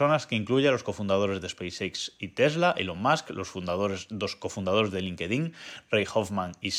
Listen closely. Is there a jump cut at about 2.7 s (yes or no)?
no